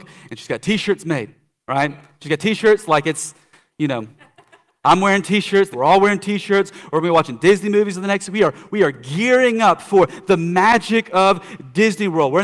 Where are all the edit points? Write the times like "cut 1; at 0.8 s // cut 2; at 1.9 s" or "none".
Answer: cut 1; at 5.7 s